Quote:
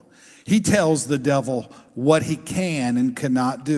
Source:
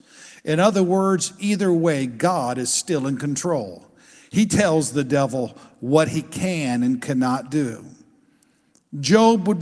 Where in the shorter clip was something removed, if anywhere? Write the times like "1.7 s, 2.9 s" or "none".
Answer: none